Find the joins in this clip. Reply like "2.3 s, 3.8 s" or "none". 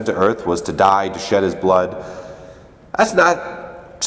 none